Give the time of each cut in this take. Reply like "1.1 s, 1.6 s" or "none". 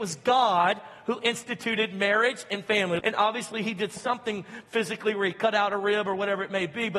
3.0 s